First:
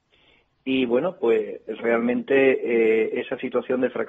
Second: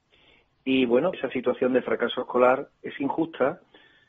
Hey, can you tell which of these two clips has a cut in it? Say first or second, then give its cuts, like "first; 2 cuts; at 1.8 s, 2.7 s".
second; 1 cut; at 1.1 s